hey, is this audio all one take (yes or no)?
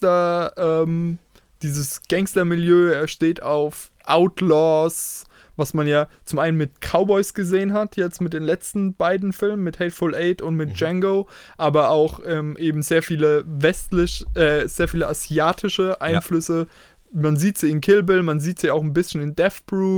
yes